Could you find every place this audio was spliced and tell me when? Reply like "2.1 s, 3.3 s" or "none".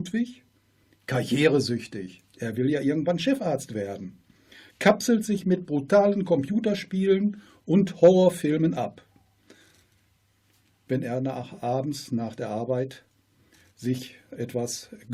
none